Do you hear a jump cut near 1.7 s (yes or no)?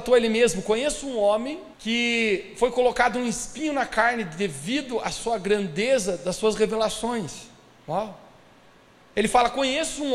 yes